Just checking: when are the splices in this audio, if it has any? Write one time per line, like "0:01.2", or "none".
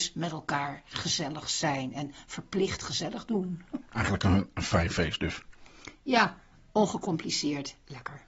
none